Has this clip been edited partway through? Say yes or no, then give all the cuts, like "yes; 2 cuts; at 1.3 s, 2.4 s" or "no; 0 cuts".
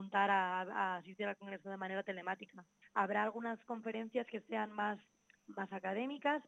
yes; 1 cut; at 2.8 s